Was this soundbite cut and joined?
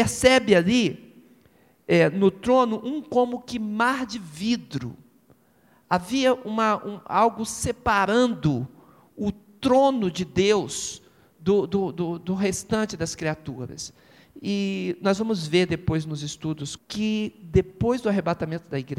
yes; 1 cut; at 16.8 s

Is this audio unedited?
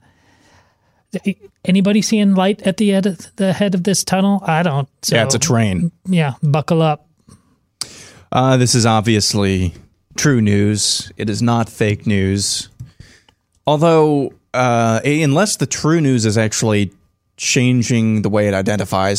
yes; 0 cuts

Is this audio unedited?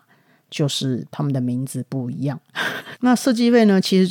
no; 1 cut; at 3.0 s

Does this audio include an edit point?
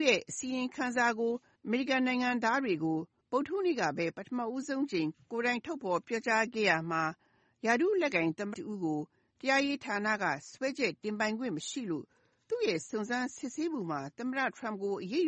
yes; 1 cut; at 8.5 s

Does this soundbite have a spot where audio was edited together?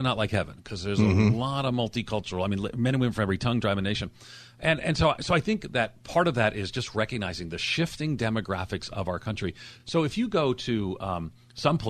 no; 0 cuts

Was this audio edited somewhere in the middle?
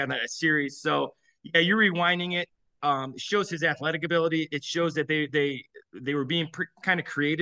no; 0 cuts

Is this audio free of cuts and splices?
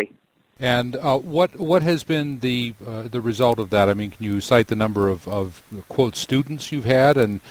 yes; 0 cuts

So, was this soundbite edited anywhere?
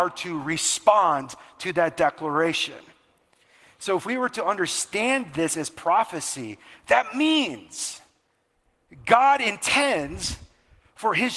no; 0 cuts

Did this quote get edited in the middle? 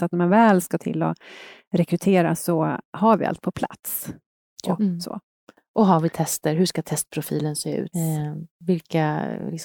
yes; 2 cuts; at 4.8 s, 7.9 s

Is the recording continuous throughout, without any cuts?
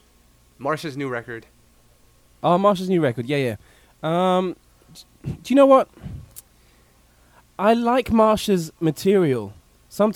yes; 0 cuts

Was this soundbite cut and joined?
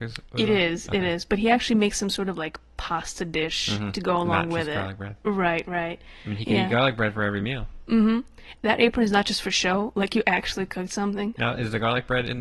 yes; 2 cuts; at 8.6 s, 11.4 s

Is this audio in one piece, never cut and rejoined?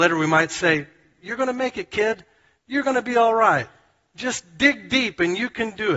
yes; 0 cuts

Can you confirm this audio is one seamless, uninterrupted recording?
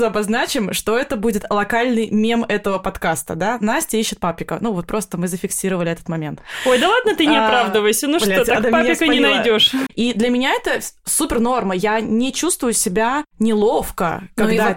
no; 1 cut; at 9.9 s

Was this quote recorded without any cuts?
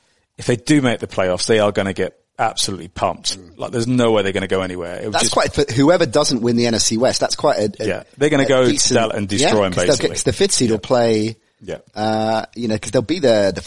yes; 0 cuts

